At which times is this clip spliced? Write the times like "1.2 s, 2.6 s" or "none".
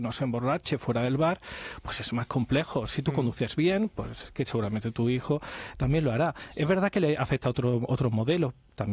none